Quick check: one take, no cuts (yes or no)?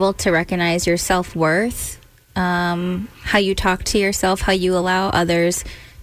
yes